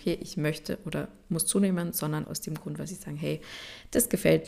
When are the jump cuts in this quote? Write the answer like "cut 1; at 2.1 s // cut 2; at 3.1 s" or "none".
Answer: cut 1; at 2.2 s